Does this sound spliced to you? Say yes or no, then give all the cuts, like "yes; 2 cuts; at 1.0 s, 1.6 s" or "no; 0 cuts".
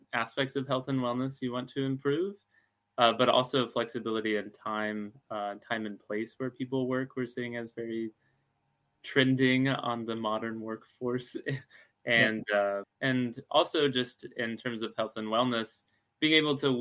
yes; 1 cut; at 12.8 s